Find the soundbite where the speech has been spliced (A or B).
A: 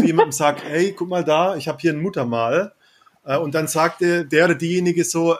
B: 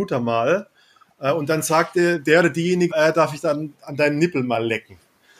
B